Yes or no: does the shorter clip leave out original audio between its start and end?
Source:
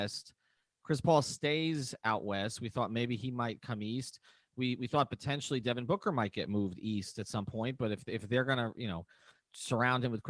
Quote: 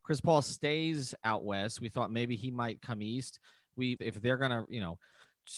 yes